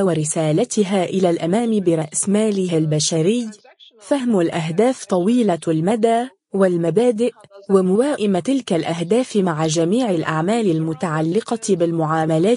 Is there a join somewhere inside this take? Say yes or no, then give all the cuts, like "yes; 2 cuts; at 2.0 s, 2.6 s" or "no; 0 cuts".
no; 0 cuts